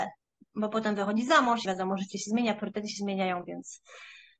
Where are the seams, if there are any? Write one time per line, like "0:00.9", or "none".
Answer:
0:01.7